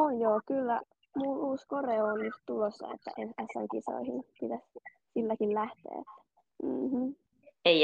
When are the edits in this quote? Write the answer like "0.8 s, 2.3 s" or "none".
6.6 s